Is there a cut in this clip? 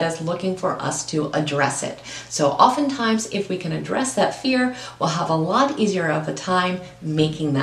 no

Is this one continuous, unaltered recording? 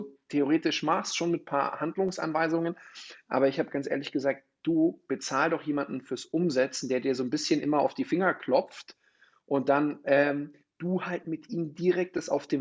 yes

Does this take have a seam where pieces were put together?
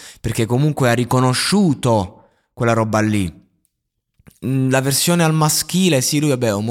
no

